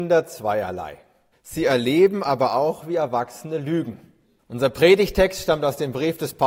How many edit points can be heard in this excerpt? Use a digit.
2